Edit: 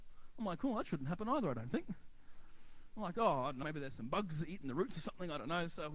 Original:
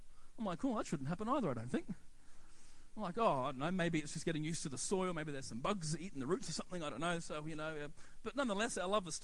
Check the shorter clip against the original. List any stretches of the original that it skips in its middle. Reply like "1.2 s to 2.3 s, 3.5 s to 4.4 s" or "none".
3.6 s to 5.1 s